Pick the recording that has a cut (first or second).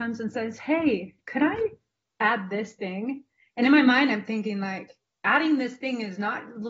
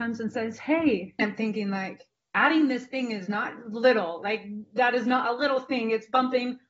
second